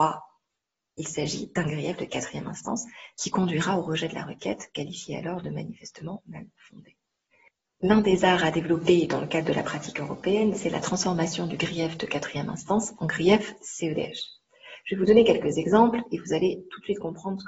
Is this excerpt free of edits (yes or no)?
yes